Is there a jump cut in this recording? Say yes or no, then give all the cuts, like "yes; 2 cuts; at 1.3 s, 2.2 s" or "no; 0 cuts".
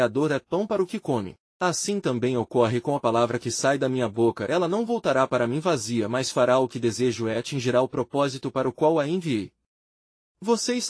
no; 0 cuts